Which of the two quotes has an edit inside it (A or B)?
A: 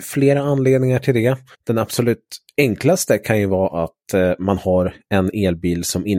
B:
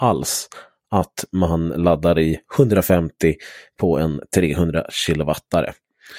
A